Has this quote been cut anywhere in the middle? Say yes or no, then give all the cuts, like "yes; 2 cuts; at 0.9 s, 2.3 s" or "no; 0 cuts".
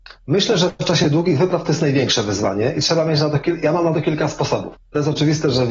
yes; 1 cut; at 4.8 s